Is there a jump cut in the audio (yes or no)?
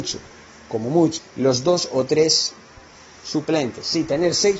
yes